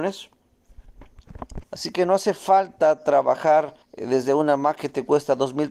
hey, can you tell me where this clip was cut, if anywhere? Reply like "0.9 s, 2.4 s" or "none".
1.6 s, 3.8 s